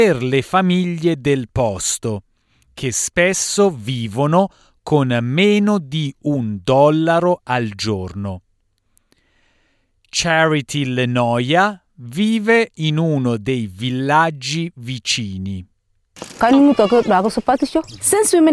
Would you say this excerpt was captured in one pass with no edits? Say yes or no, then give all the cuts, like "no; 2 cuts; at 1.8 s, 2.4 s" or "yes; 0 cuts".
yes; 0 cuts